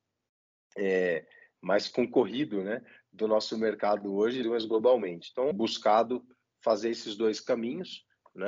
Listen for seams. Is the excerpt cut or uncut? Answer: cut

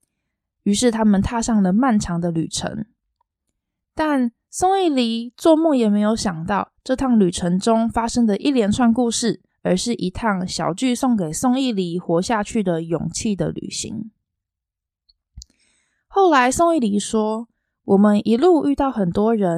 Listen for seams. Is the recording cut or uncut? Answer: cut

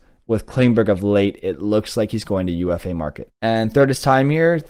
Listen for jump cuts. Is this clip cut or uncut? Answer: cut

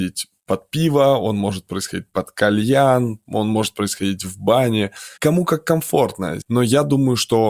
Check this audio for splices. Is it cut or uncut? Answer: cut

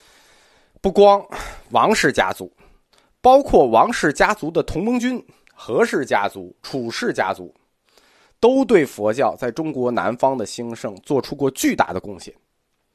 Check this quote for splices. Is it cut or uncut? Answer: uncut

